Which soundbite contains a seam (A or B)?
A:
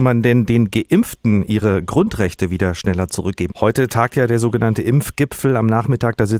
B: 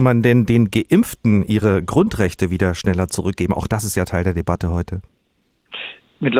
A